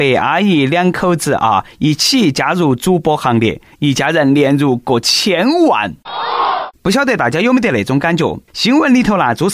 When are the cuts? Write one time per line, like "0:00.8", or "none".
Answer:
0:08.5